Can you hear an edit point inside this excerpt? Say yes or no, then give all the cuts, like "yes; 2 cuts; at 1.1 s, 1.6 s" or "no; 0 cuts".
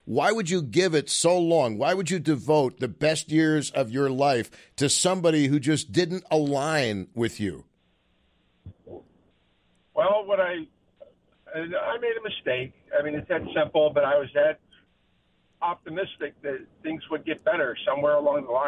no; 0 cuts